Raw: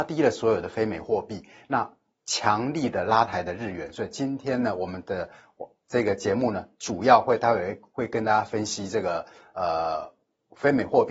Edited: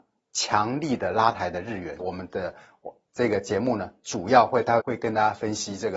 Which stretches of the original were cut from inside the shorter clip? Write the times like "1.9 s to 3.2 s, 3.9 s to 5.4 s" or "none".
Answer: 3.9 s to 4.7 s, 7.5 s to 7.9 s